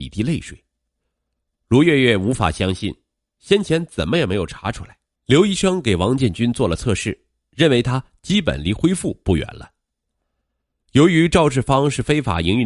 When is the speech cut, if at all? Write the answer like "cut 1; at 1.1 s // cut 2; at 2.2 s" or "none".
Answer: cut 1; at 1.5 s // cut 2; at 5.2 s